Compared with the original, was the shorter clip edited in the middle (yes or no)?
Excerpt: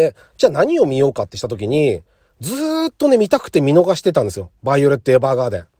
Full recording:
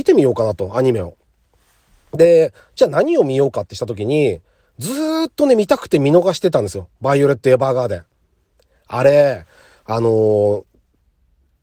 no